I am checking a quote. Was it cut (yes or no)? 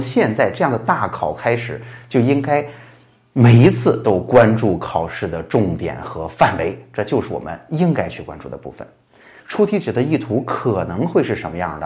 yes